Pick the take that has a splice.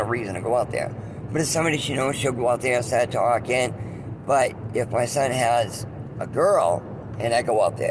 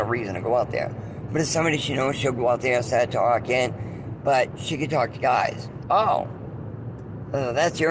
second; 2 cuts; at 4.2 s, 5.8 s

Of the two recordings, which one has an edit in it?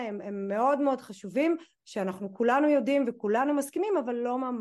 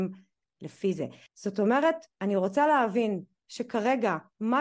second; 1 cut; at 1.3 s

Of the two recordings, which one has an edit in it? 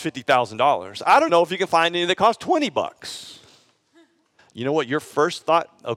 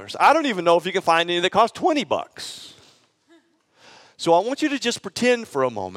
first; 2 cuts; at 1.3 s, 4.4 s

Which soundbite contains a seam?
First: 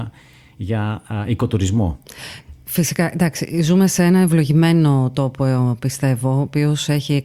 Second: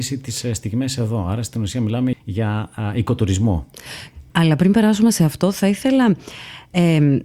second; 2 cuts; at 2.1 s, 4.3 s

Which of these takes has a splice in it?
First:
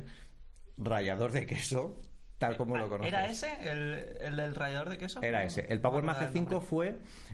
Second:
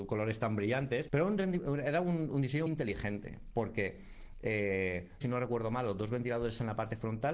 second; 3 cuts; at 1.1 s, 2.7 s, 5.2 s

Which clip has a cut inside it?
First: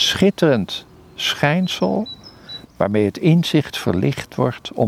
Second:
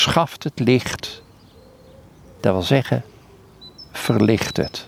first; 1 cut; at 2.6 s

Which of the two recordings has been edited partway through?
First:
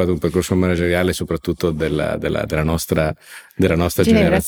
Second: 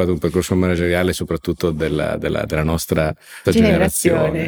second; 1 cut; at 3.4 s

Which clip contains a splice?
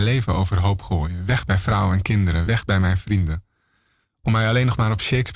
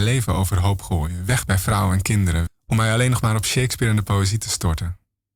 second; 1 cut; at 2.5 s

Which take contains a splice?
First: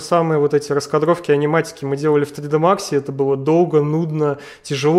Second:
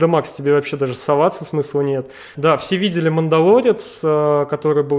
second; 1 cut; at 2.3 s

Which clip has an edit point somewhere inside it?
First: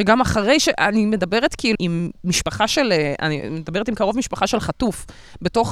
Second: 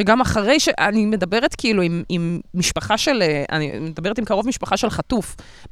first; 1 cut; at 1.8 s

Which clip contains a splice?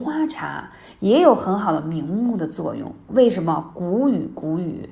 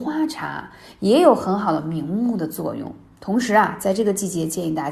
first; 1 cut; at 3.1 s

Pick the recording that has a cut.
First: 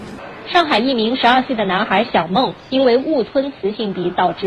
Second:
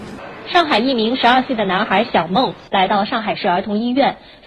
second; 1 cut; at 2.7 s

